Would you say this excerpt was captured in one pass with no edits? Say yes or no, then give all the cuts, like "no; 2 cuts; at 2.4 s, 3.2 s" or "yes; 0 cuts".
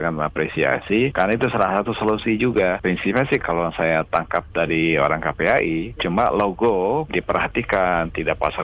no; 3 cuts; at 3.4 s, 6.0 s, 7.1 s